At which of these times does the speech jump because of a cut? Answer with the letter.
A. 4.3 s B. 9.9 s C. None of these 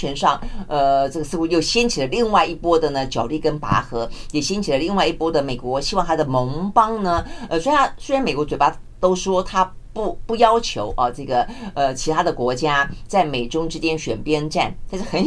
C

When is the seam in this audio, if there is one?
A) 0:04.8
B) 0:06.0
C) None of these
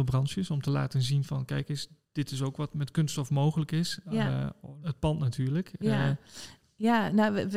A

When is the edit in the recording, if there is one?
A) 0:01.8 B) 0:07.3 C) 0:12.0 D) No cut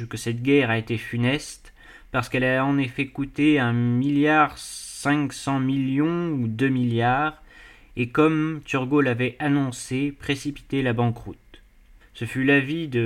C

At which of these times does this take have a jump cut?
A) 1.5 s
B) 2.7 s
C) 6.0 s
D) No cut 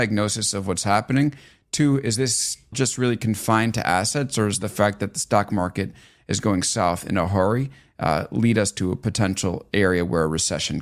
B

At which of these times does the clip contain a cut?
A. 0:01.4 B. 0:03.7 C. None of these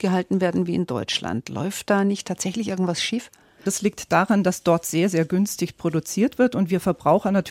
B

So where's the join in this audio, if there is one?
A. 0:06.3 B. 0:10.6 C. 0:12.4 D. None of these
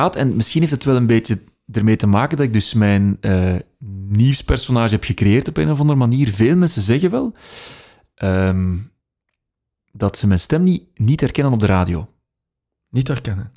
D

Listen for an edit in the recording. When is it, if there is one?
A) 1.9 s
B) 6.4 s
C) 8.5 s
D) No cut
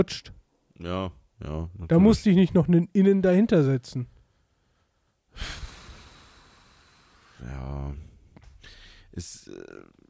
D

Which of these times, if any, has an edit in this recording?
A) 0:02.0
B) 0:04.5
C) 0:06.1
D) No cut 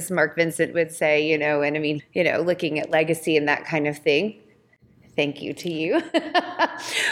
A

